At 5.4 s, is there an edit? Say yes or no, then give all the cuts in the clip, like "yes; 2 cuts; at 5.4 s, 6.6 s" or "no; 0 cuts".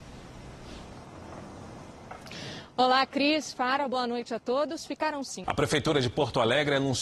yes; 1 cut; at 5.4 s